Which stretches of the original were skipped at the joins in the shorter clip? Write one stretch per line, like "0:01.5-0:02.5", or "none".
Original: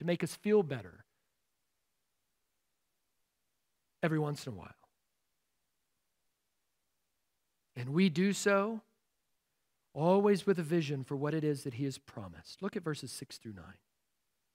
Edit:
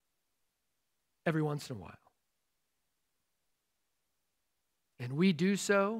none